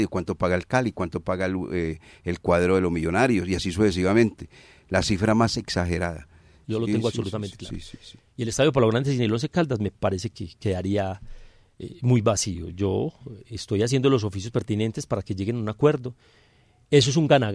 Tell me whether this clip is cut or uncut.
cut